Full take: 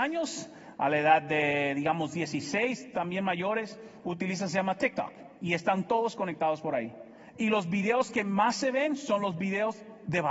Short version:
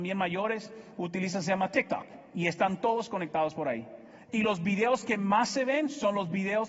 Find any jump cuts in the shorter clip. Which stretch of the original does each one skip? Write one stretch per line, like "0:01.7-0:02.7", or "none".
none